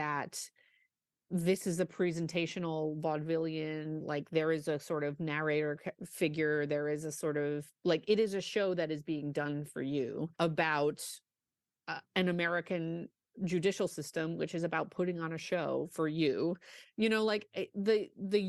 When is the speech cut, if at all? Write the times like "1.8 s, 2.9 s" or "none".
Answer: 10.3 s